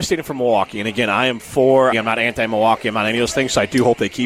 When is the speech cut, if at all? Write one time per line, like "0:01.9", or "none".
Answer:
0:01.9